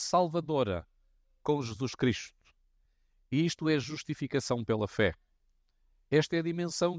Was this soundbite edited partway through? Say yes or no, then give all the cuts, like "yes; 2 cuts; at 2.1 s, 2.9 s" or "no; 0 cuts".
no; 0 cuts